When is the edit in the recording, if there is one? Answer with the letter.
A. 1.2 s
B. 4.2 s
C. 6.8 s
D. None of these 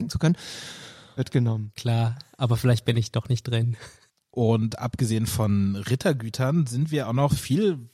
A